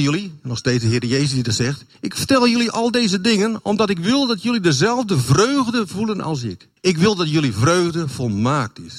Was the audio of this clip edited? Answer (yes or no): yes